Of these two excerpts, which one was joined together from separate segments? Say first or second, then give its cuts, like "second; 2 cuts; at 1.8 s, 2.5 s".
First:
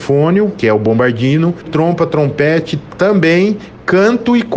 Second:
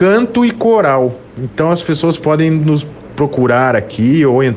first; 2 cuts; at 1.6 s, 2.9 s